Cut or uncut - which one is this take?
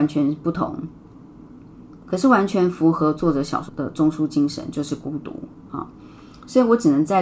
cut